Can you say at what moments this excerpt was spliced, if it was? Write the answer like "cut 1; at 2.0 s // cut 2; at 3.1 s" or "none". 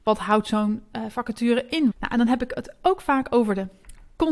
cut 1; at 1.9 s